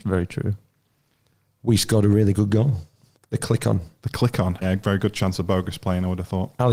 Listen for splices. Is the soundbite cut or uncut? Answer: cut